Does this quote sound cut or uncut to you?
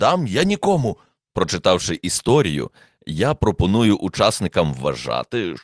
cut